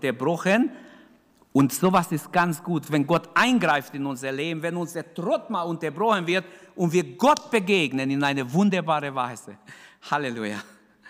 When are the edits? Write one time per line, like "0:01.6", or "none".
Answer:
none